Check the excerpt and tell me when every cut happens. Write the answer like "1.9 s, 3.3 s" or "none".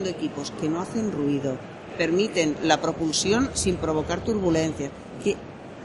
1.9 s